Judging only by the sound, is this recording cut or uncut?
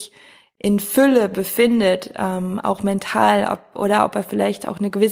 uncut